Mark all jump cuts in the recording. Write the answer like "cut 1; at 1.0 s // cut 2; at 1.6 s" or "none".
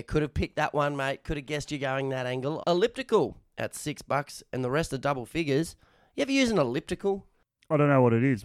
cut 1; at 2.6 s